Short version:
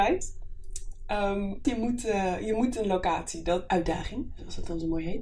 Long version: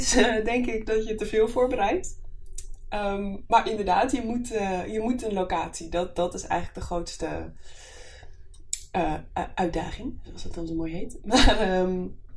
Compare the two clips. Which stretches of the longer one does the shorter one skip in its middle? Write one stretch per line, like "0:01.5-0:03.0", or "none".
0:03.5-0:04.1
0:06.1-0:09.6

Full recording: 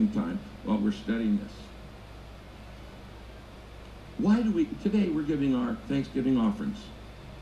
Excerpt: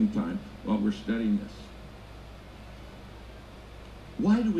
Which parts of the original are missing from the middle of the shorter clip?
none

